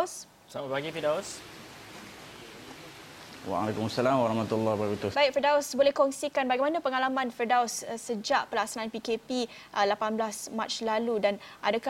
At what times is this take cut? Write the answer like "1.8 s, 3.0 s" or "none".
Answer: 5.1 s

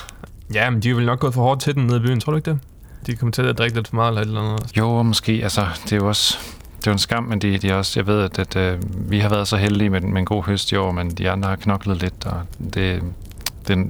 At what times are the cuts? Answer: 4.7 s

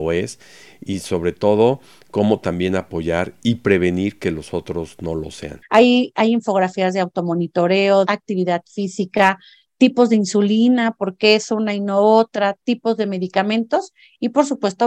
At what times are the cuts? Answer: 5.6 s, 8.1 s

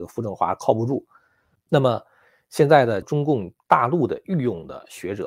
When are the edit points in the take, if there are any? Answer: 1.6 s, 3.0 s

